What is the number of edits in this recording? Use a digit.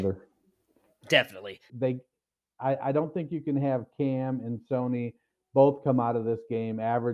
1